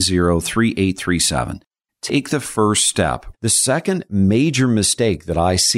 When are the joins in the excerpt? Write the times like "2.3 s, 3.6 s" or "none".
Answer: 1.9 s, 3.3 s